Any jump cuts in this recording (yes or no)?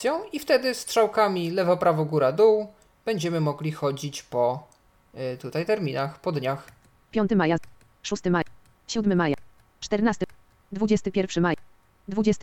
no